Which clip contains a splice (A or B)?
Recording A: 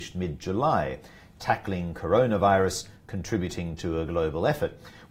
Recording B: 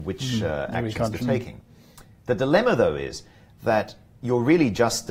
B